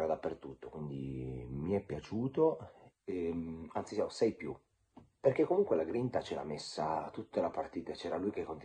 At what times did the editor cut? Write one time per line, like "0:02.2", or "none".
0:02.9

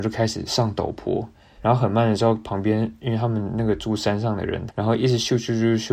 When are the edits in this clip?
0:01.6
0:04.7

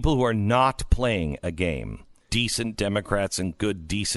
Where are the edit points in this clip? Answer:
0:02.3

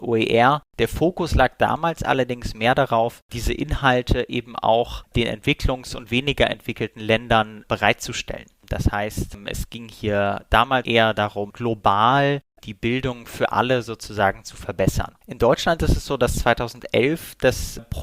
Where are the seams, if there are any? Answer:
0:10.8
0:15.2

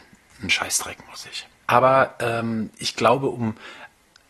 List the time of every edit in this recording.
0:01.7

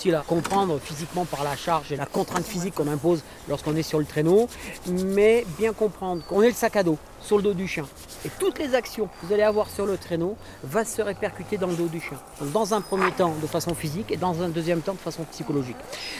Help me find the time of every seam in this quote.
none

